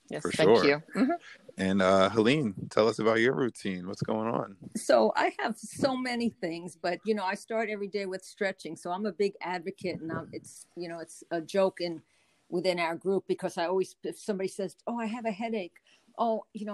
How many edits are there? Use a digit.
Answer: 0